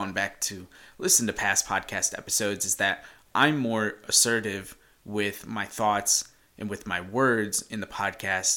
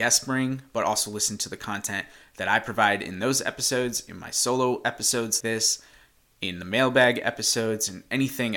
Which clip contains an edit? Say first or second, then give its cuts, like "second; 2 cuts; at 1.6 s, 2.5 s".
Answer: second; 1 cut; at 5.4 s